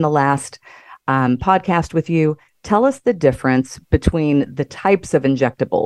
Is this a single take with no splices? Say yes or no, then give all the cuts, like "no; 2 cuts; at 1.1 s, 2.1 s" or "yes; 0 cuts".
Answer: yes; 0 cuts